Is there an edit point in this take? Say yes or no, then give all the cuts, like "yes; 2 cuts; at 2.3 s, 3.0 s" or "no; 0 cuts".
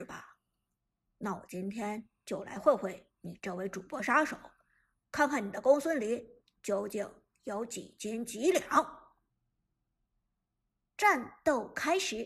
yes; 1 cut; at 1.1 s